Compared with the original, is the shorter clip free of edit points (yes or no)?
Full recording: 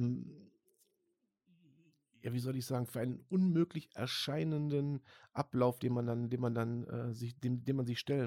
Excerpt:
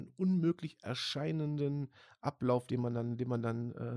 yes